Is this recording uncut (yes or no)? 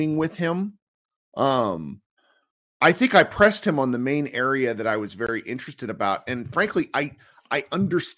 yes